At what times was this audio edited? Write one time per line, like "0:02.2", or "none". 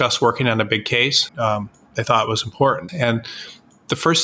0:01.3
0:02.9